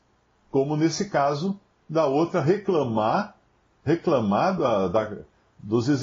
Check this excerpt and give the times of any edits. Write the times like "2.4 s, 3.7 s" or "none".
none